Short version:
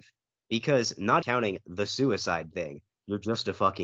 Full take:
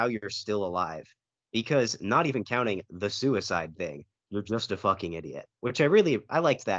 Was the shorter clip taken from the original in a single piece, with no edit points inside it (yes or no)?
no